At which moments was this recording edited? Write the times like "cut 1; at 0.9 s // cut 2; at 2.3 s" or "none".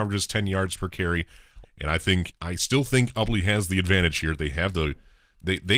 cut 1; at 1.6 s